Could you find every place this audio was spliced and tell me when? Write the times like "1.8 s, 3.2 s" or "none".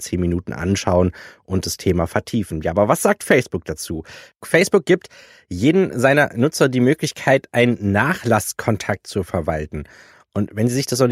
none